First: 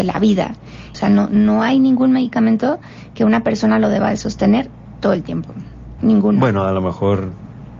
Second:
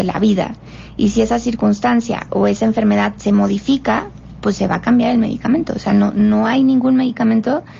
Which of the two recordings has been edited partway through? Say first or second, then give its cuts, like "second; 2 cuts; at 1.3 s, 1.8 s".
first; 2 cuts; at 0.9 s, 6.0 s